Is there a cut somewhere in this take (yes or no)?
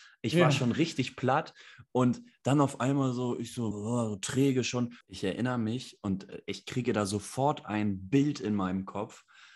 yes